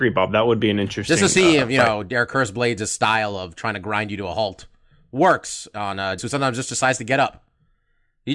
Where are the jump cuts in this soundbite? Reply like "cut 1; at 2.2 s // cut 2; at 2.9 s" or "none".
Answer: cut 1; at 6.2 s